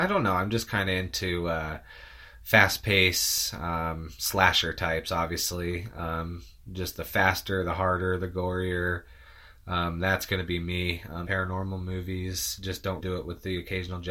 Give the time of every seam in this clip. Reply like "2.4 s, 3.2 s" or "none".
11.2 s, 13.0 s